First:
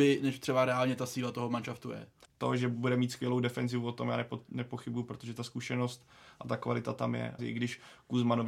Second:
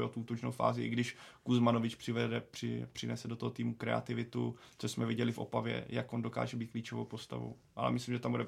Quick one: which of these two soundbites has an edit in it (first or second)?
first